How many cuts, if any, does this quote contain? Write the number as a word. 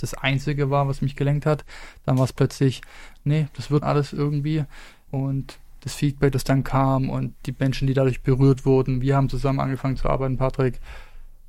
two